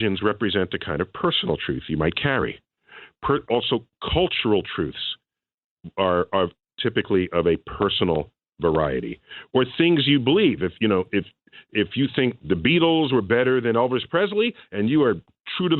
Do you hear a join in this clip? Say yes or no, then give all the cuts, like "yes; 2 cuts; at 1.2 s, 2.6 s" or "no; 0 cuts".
yes; 2 cuts; at 3.5 s, 11.6 s